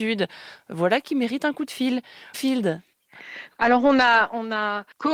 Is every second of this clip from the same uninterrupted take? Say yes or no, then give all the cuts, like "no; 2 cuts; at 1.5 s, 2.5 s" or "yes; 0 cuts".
no; 2 cuts; at 2.3 s, 3.5 s